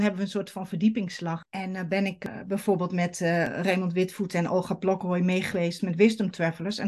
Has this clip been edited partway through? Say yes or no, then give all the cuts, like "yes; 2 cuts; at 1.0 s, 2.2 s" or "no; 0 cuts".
yes; 1 cut; at 1.4 s